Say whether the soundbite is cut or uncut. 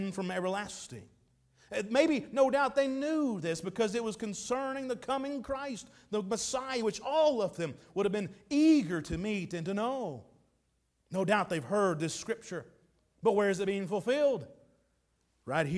uncut